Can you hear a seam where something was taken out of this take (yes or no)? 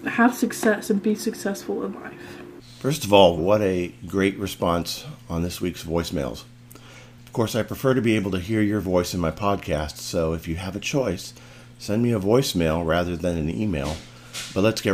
yes